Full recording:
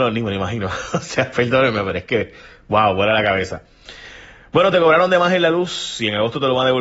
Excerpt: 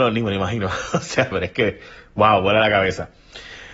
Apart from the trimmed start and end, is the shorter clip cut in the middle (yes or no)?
yes